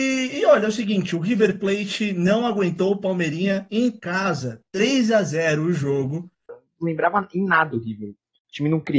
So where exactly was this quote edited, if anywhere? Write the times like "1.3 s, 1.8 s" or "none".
6.5 s